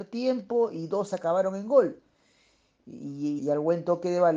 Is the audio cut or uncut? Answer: cut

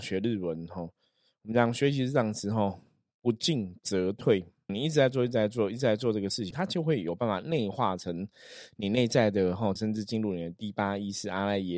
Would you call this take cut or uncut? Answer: cut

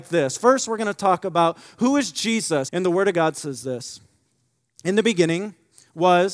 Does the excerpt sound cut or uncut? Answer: cut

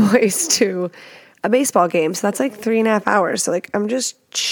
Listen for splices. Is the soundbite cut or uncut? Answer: uncut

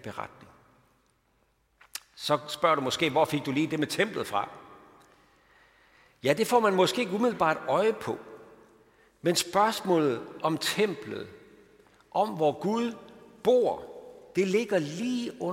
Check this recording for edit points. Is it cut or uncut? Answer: cut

